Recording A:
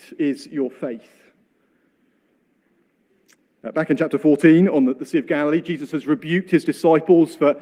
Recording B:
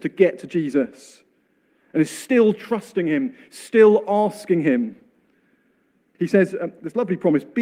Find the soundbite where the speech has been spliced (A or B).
B